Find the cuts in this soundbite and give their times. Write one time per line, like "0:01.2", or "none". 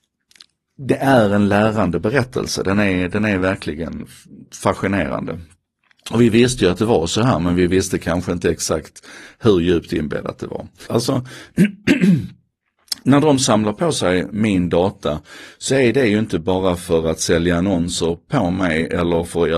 0:10.9

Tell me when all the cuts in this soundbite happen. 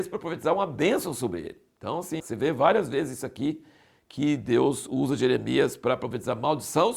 0:02.2

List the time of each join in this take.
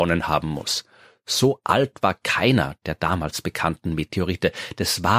none

